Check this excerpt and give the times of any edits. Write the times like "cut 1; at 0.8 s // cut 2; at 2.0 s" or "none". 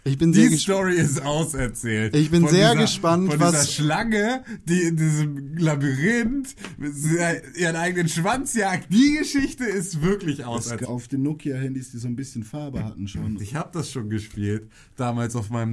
cut 1; at 10.8 s // cut 2; at 13.4 s